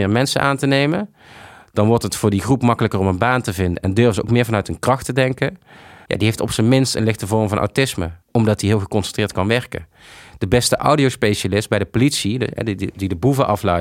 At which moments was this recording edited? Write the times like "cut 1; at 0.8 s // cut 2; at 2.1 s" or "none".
cut 1; at 6.1 s // cut 2; at 8.2 s